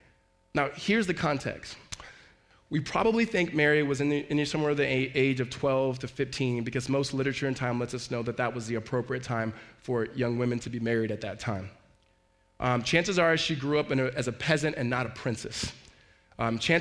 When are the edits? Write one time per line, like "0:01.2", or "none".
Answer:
none